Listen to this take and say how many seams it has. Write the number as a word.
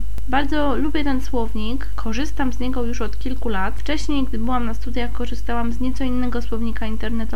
zero